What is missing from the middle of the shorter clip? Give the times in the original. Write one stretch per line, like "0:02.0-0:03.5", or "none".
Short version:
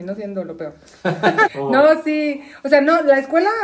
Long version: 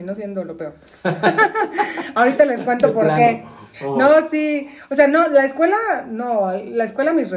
0:01.5-0:03.7